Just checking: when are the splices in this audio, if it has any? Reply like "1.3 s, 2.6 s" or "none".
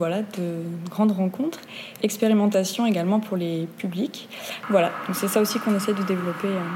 none

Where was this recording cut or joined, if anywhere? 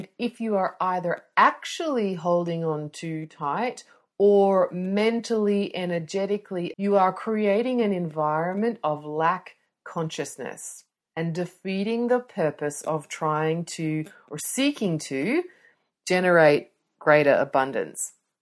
6.7 s

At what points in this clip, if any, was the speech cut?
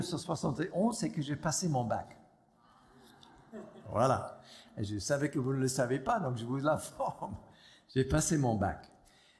none

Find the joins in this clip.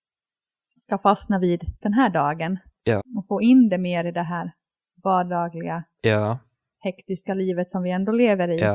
1.8 s, 3.0 s

